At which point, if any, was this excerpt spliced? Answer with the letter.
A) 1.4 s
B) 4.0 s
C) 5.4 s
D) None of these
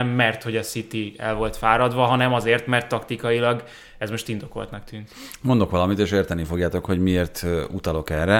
D